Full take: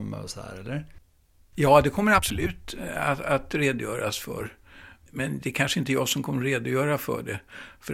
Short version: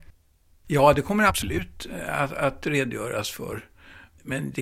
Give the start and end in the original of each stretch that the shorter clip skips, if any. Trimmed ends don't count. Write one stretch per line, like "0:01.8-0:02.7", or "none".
none

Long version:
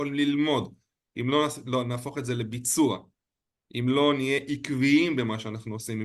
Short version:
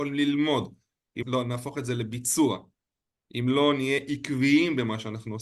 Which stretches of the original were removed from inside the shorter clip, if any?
0:01.2-0:01.6

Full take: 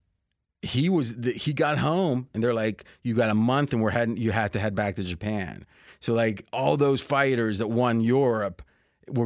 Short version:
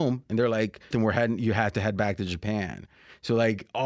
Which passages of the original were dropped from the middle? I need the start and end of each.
0:03.0-0:03.7

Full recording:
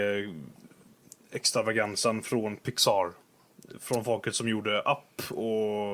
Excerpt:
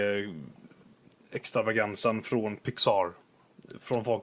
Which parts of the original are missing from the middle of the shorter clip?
none

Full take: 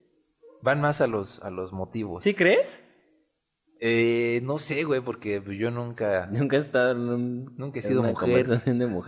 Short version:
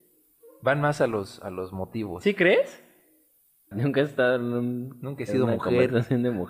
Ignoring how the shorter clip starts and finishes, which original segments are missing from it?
0:03.7-0:06.3

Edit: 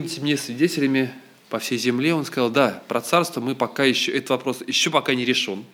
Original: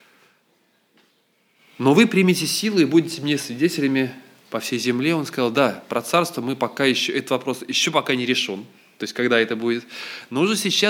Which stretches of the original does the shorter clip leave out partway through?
none

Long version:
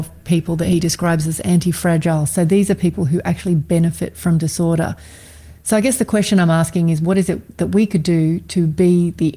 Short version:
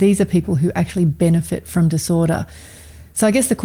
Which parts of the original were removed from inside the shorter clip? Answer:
none

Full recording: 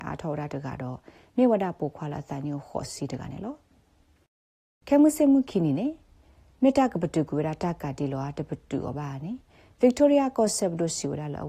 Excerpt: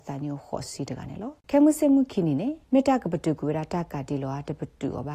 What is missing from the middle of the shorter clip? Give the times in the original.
0:03.6-0:04.8
0:06.0-0:06.5

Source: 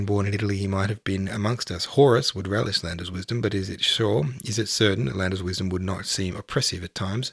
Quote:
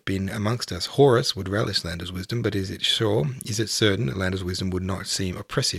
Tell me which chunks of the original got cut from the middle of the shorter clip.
none

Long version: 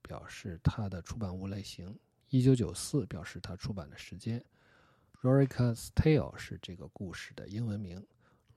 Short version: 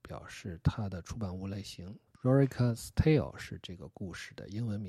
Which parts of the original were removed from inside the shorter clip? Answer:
0:02.1-0:05.1

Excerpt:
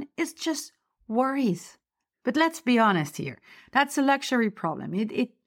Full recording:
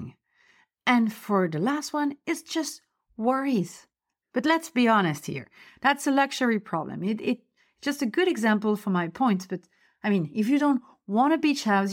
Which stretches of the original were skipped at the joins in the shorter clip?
none

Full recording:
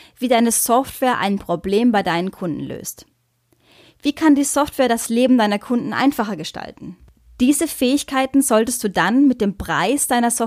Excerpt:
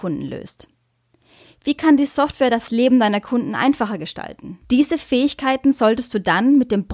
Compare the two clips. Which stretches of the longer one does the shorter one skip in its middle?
0:07.0-0:07.3

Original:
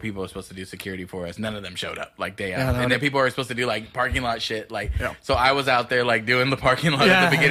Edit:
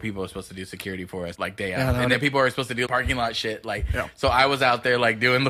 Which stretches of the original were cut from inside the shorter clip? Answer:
0:01.3-0:02.1
0:03.7-0:03.9

